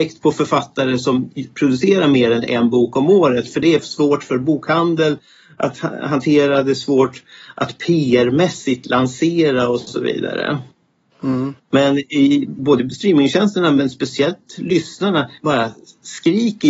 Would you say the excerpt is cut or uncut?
cut